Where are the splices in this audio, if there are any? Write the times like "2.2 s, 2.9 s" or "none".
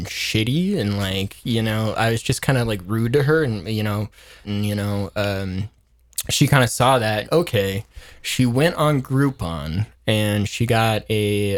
4.4 s, 7.2 s